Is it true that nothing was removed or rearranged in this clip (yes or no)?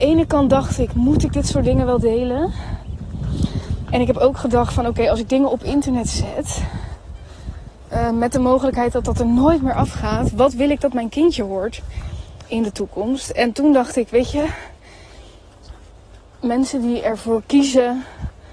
no